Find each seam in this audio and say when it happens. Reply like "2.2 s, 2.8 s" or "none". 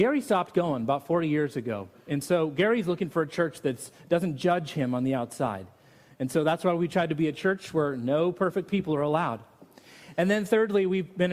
none